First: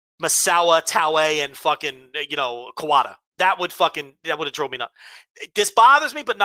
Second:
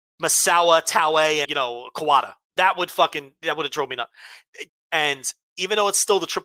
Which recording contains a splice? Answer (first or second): second